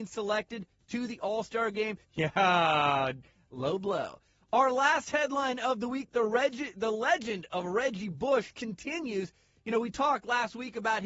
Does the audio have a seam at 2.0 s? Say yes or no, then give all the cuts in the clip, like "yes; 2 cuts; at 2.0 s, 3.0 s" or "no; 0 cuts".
yes; 1 cut; at 2.0 s